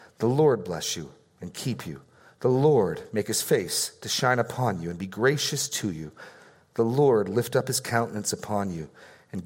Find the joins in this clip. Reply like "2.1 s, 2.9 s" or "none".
none